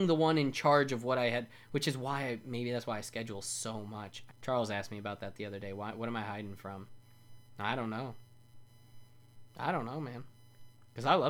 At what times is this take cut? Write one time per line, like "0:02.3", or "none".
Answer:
0:04.3